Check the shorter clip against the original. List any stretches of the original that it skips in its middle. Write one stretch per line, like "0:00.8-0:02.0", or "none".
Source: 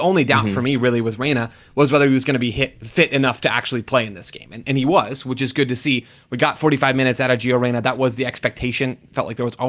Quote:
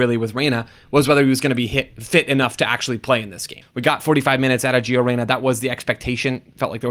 0:04.5-0:06.2